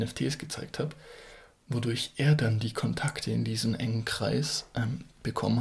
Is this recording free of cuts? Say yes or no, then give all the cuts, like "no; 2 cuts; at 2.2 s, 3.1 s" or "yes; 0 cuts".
yes; 0 cuts